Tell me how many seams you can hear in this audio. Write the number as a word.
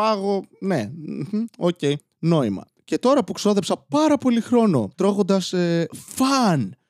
one